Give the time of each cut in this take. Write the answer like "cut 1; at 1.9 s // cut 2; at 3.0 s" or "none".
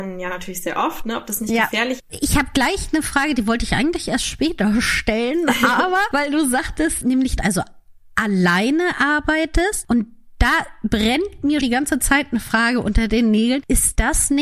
cut 1; at 2.0 s // cut 2; at 7.4 s // cut 3; at 11.6 s